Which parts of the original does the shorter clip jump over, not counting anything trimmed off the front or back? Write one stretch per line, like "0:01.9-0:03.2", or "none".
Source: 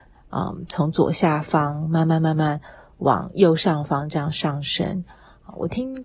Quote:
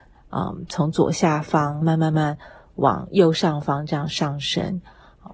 0:01.8-0:02.0

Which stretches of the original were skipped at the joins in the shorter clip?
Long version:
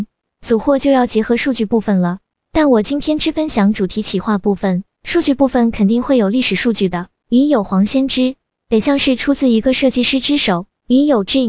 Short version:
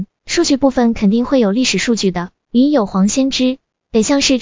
none

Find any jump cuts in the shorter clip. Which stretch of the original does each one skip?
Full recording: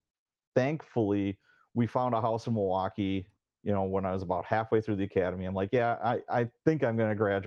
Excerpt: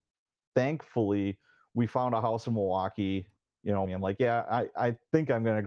0:03.9-0:05.4

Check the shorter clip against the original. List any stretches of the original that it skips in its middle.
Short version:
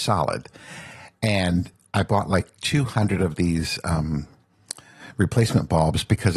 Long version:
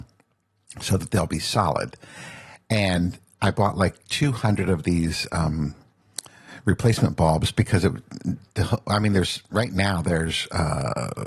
none

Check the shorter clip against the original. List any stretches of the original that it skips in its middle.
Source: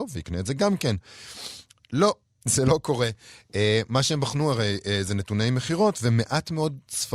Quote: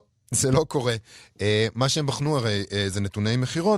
none

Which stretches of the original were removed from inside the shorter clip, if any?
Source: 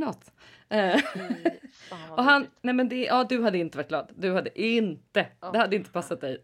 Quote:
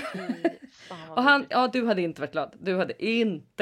0:02.5-0:03.1

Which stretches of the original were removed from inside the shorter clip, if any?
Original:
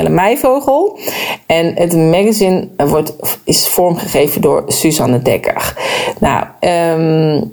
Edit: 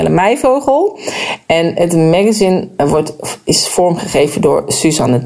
none

